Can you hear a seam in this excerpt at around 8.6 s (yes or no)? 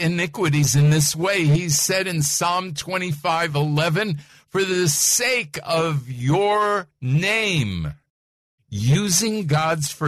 yes